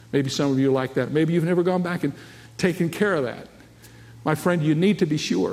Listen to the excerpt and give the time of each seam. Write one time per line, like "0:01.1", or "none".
none